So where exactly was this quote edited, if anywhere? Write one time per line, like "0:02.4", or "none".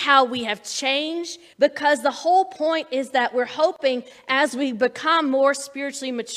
0:01.5